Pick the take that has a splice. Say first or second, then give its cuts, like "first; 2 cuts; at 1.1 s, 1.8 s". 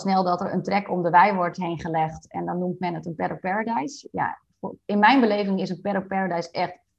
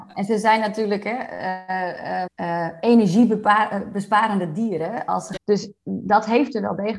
second; 2 cuts; at 2.3 s, 5.4 s